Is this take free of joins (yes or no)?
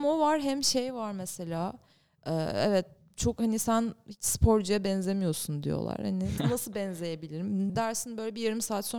no